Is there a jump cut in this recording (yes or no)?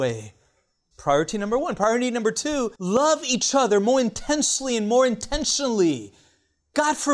yes